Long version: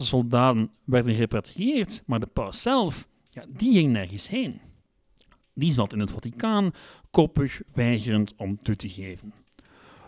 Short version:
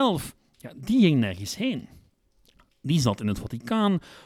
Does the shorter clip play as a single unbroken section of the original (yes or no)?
yes